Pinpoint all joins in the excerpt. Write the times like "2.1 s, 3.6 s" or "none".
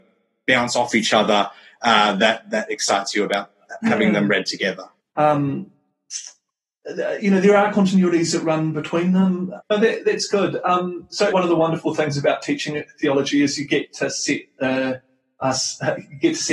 5.0 s, 9.6 s, 11.3 s